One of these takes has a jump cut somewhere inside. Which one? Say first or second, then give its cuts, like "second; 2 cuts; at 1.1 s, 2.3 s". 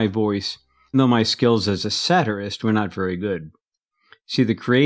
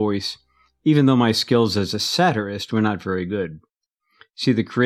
first; 1 cut; at 0.9 s